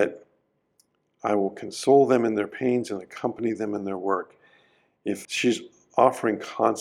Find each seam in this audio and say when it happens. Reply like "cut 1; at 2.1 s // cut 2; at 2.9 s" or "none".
cut 1; at 5.2 s